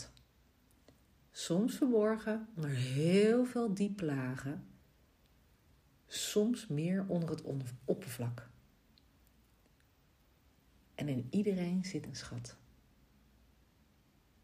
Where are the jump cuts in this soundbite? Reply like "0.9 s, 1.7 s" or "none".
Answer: none